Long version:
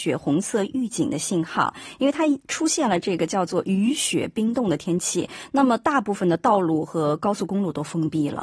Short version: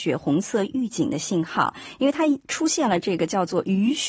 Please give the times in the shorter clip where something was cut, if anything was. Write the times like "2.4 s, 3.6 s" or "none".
none